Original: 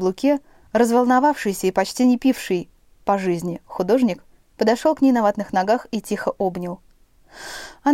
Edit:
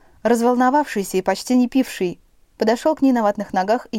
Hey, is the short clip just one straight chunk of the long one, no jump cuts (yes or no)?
no